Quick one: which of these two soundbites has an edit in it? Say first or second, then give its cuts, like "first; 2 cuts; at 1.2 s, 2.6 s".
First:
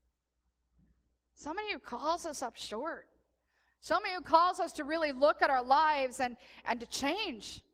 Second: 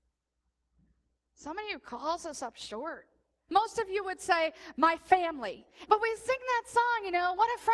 second; 2 cuts; at 3.5 s, 5.9 s